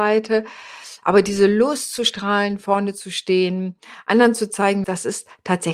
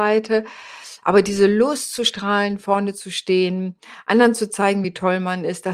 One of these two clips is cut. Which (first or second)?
first